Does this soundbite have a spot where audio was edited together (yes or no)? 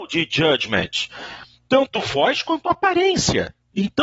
no